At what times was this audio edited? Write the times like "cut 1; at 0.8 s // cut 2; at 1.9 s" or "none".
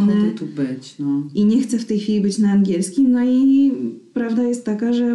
none